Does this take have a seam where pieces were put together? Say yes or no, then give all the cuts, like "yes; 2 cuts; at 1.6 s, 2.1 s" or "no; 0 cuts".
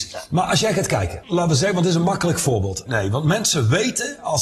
yes; 2 cuts; at 1.2 s, 2.9 s